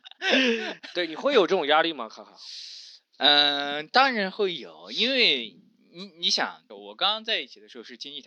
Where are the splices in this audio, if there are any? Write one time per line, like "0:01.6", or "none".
0:06.7